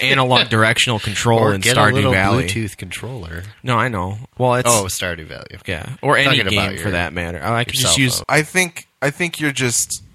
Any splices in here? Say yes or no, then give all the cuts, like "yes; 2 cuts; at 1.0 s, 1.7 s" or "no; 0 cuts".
yes; 1 cut; at 8.2 s